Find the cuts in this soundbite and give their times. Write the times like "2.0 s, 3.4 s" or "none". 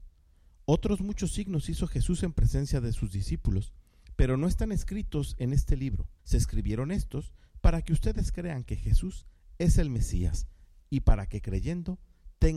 6.2 s, 10.8 s

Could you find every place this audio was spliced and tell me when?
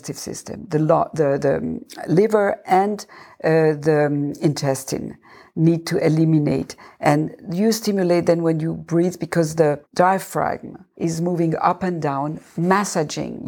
none

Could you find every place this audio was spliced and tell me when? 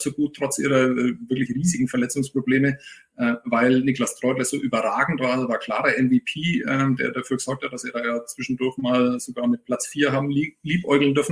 none

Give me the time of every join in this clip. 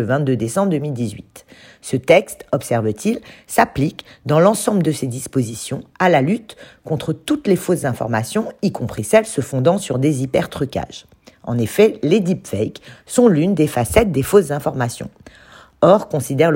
none

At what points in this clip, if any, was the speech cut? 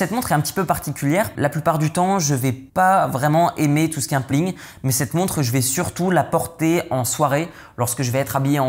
1.3 s, 2.7 s, 4.3 s

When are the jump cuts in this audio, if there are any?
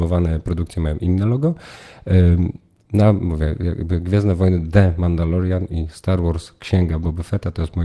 none

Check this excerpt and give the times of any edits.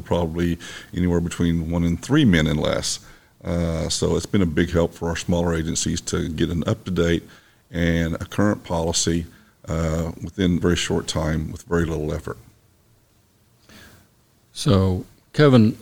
10.6 s

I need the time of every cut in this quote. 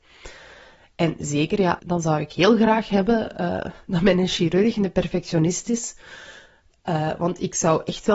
1.8 s

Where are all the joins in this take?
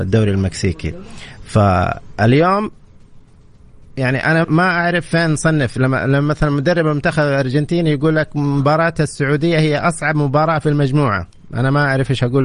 4.4 s

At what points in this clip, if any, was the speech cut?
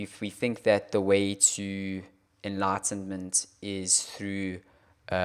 none

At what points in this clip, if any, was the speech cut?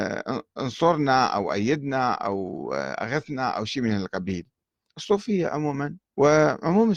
6.0 s

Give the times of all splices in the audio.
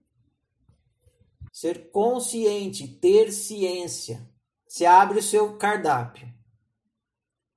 1.5 s, 4.5 s

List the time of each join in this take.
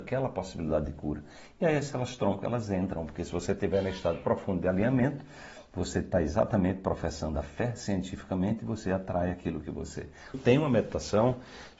10.3 s

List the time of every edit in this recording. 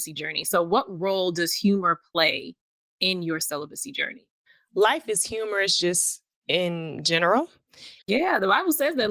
8.0 s

